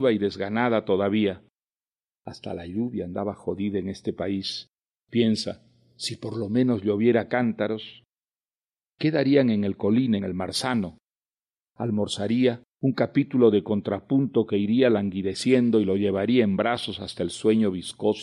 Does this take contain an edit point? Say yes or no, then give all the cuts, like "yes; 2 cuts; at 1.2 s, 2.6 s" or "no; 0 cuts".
yes; 2 cuts; at 10.2 s, 12.7 s